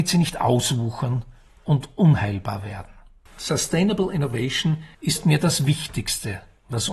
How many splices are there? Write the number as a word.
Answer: two